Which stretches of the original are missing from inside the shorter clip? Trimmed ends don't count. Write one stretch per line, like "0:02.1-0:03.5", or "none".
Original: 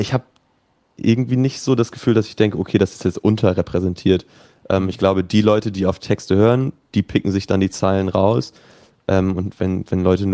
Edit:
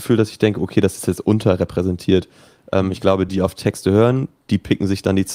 0:05.3-0:05.7